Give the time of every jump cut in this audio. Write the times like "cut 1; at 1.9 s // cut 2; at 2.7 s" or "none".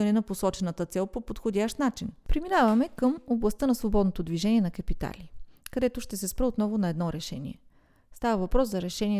cut 1; at 2.2 s